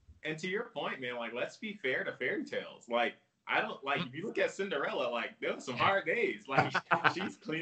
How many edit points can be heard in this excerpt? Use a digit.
0